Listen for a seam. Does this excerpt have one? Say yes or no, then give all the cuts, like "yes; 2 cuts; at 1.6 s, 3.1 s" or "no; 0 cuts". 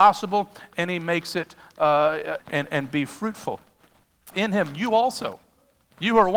yes; 2 cuts; at 2.4 s, 4.3 s